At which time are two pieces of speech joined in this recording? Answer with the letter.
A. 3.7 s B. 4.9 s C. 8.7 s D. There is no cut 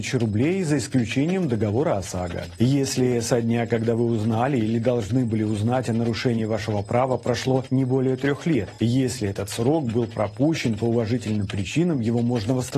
D